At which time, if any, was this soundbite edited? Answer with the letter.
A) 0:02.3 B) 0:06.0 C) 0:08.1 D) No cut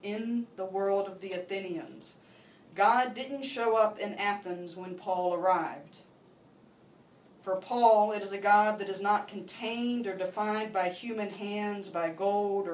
D